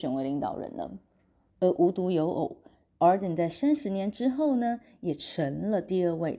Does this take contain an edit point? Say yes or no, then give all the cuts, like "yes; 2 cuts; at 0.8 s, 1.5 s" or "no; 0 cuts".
yes; 1 cut; at 1.5 s